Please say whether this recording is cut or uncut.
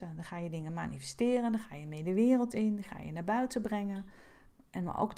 uncut